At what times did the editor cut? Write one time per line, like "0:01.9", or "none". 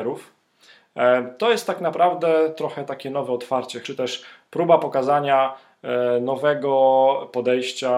0:03.8